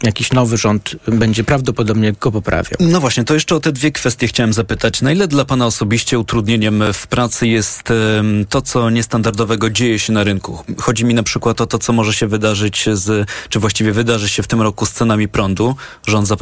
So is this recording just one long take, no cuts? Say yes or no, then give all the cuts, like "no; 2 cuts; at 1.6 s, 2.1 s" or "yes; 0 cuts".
yes; 0 cuts